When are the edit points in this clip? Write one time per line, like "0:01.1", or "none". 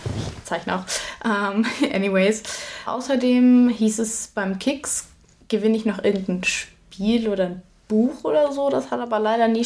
none

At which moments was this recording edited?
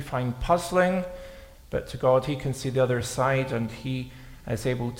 0:01.5

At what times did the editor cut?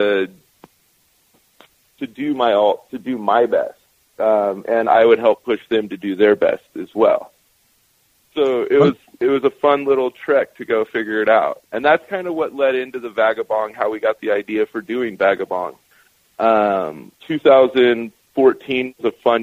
0:08.3
0:11.7
0:17.2

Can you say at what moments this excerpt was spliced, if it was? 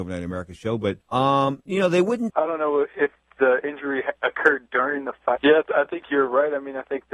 0:01.0
0:02.3
0:05.4

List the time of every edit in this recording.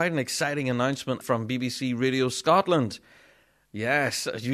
0:01.2

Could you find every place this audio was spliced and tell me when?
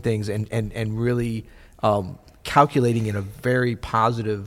none

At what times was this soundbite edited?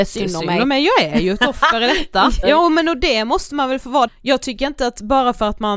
0:02.4
0:04.1

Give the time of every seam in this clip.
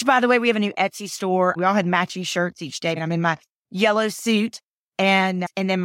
0:01.6
0:03.0

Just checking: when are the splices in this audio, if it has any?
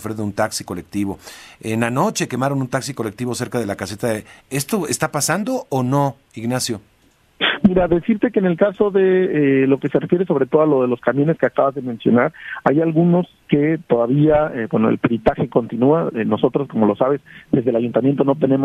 none

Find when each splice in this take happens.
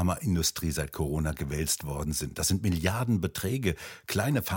none

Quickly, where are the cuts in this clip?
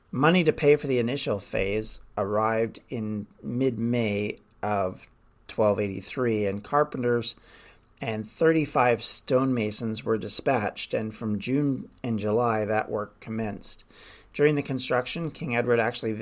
none

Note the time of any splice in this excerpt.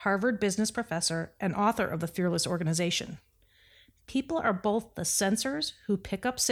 none

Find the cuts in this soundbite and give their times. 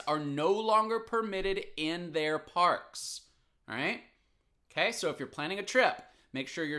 none

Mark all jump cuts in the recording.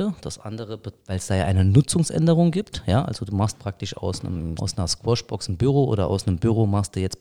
0:04.6

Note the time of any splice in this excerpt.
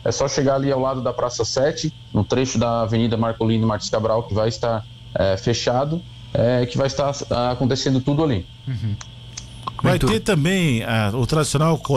none

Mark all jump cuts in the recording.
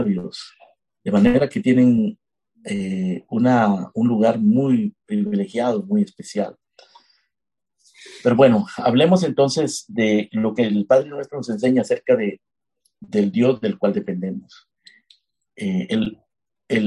none

